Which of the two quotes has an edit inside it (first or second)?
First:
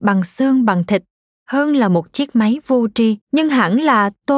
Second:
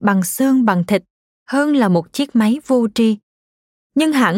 first